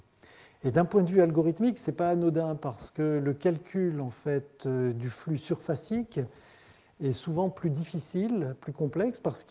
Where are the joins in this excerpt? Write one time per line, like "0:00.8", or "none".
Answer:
none